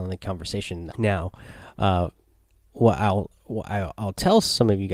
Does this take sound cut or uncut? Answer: cut